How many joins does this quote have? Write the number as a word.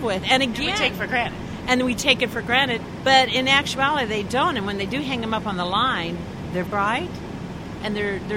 two